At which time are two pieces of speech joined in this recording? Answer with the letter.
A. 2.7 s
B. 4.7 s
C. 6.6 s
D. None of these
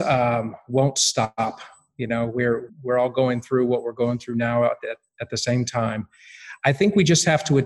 A